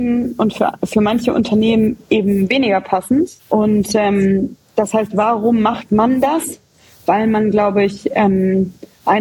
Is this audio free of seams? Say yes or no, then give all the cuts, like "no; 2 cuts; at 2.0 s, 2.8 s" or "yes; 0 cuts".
no; 1 cut; at 3.4 s